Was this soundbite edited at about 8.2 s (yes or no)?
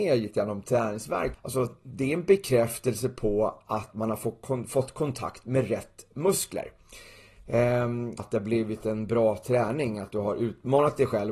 yes